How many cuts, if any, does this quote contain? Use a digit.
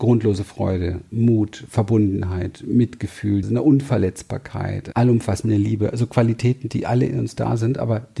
2